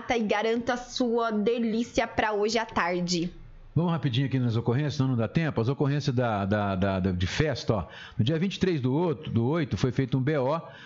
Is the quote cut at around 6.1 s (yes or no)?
no